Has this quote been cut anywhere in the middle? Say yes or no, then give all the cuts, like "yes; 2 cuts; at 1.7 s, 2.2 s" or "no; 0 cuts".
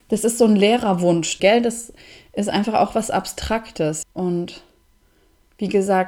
yes; 2 cuts; at 1.4 s, 4.0 s